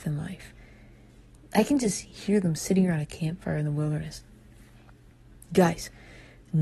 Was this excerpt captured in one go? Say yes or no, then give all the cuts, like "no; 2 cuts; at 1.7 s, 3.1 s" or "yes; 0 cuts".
yes; 0 cuts